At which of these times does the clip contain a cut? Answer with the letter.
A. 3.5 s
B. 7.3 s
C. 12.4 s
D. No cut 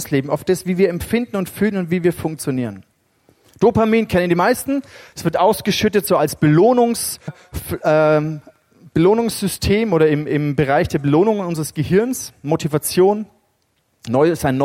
B